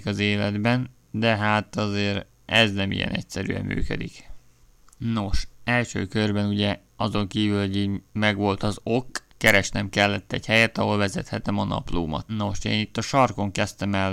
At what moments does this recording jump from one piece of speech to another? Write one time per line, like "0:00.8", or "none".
0:12.3